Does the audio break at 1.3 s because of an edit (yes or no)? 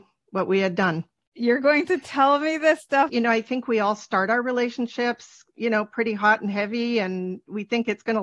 yes